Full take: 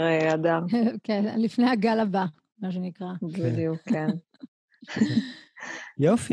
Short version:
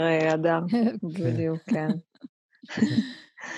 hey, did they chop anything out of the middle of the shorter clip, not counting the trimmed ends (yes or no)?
yes